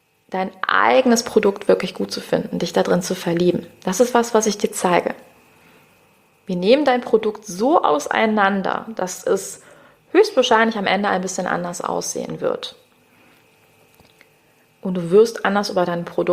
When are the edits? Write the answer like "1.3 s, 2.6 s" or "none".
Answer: none